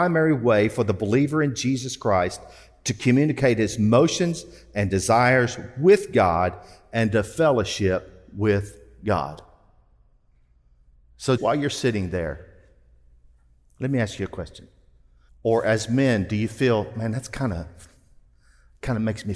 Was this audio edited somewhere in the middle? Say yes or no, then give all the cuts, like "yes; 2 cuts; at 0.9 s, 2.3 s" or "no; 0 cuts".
yes; 2 cuts; at 11.4 s, 15.3 s